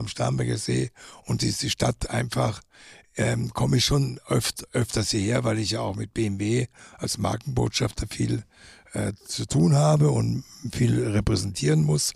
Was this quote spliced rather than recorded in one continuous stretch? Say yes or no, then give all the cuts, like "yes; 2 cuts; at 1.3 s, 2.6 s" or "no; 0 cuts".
no; 0 cuts